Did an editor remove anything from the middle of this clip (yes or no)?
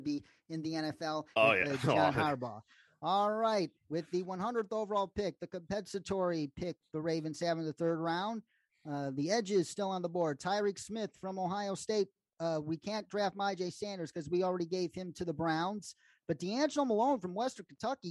yes